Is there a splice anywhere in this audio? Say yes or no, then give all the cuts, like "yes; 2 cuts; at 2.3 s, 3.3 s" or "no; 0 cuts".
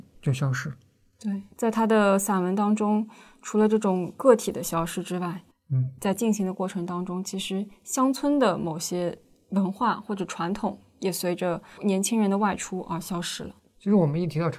yes; 1 cut; at 5.5 s